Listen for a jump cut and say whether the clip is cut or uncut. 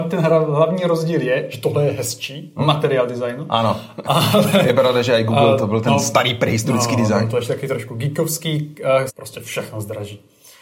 cut